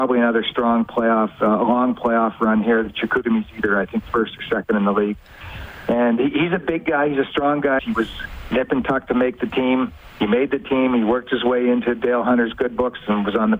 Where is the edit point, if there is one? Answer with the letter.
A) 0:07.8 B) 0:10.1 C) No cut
A